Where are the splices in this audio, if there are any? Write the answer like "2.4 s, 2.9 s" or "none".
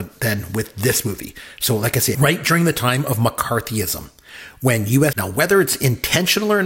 2.1 s, 5.1 s

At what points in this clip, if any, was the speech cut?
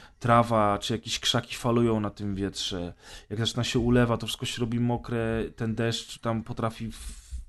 none

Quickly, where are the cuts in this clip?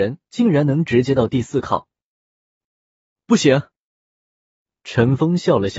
2.6 s

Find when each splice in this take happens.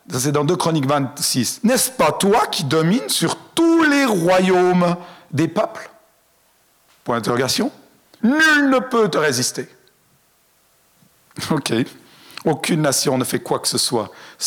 8.2 s

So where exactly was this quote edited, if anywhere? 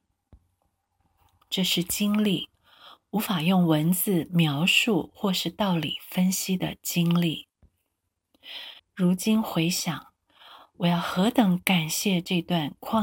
8.8 s

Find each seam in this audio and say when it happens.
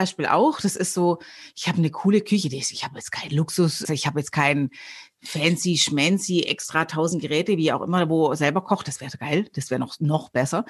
3.8 s

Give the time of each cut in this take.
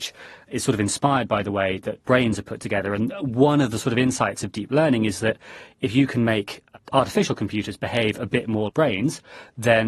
8.7 s

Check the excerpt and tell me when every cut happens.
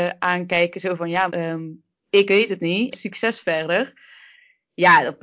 1.3 s, 2.9 s

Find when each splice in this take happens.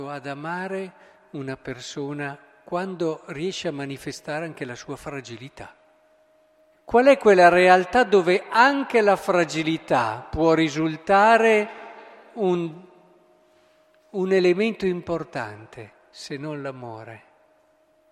6.7 s

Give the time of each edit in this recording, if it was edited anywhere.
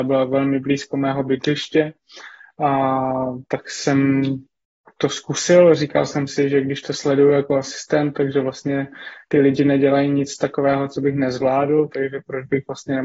none

